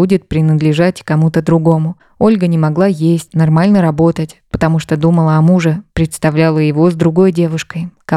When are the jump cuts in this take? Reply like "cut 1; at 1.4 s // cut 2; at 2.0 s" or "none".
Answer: cut 1; at 3.3 s